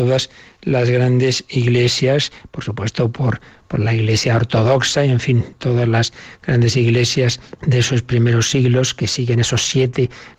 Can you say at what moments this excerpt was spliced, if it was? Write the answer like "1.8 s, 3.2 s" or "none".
7.6 s